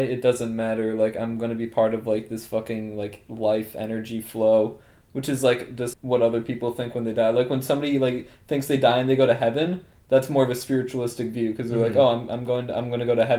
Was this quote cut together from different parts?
yes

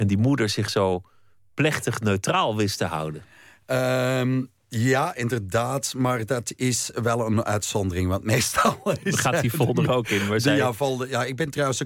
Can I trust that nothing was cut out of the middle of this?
yes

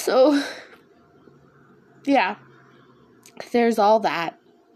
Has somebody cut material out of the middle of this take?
no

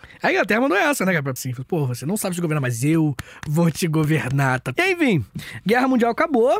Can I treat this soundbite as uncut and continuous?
no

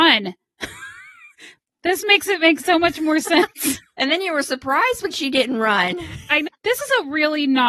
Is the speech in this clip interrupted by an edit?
yes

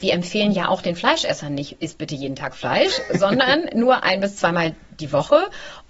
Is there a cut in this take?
no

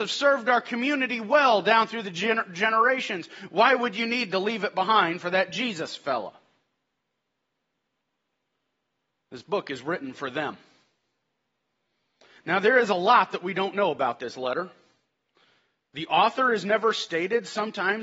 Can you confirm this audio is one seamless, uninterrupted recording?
yes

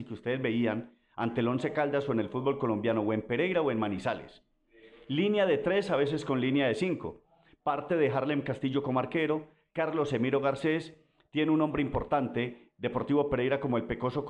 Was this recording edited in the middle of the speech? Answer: no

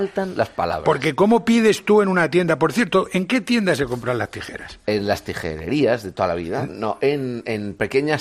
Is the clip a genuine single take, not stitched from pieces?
yes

